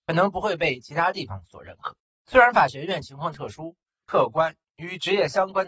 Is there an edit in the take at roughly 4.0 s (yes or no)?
yes